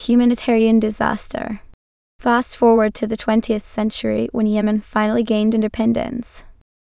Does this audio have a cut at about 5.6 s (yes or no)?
no